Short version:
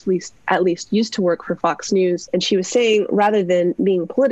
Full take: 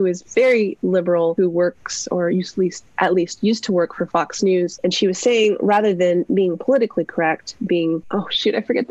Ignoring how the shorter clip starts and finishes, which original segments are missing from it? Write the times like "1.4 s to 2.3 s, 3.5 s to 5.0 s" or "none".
none